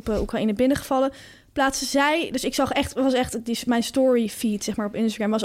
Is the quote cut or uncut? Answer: uncut